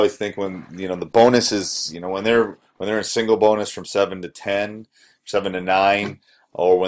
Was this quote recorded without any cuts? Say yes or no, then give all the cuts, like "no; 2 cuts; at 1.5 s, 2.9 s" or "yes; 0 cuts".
yes; 0 cuts